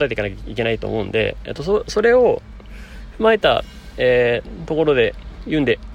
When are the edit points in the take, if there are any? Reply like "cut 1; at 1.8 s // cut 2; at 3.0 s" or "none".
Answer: none